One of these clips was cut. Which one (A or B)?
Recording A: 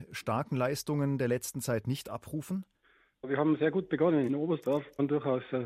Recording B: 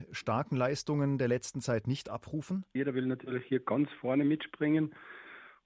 B